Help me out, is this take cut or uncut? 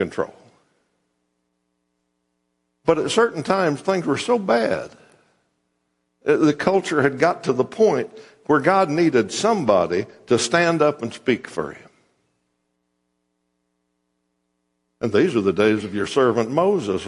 cut